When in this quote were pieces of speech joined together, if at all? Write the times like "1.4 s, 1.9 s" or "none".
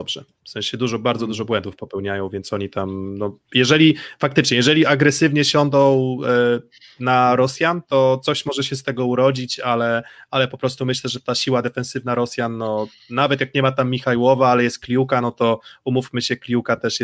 none